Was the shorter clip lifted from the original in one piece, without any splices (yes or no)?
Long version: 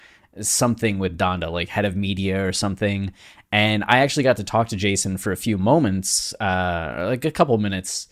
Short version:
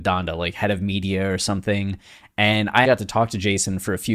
no